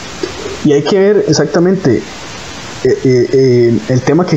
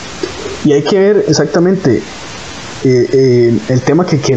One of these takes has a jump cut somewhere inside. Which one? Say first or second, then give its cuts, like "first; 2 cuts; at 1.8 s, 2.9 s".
second; 1 cut; at 2.8 s